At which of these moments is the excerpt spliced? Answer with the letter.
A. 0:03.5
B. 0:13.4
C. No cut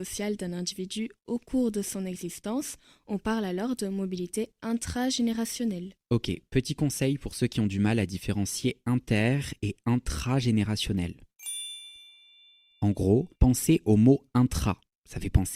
B